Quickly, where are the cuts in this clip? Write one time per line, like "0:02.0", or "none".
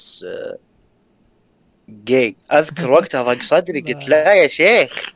0:02.4

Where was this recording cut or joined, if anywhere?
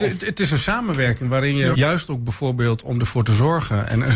0:01.7

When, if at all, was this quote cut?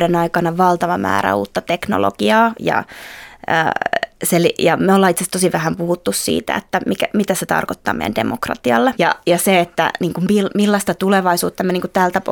0:08.9

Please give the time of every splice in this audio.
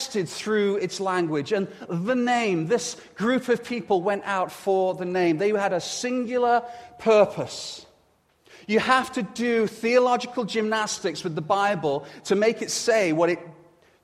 none

